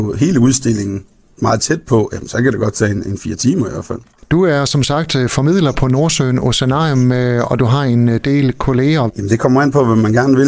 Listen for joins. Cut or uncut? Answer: cut